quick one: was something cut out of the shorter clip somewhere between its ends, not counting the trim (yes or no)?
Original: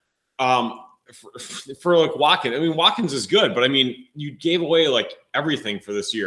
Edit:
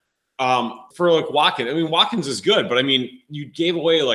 yes